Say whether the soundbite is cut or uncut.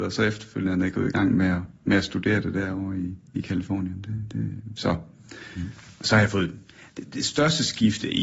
cut